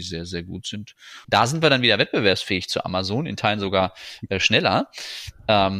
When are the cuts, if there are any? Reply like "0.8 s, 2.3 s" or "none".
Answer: 1.2 s